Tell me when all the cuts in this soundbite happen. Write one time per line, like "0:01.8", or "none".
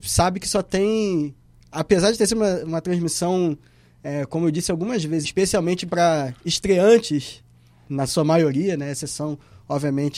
0:05.2